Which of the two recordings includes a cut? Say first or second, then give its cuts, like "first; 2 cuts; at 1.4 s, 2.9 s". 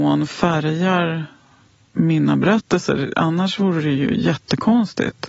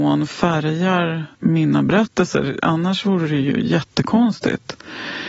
second; 1 cut; at 1.3 s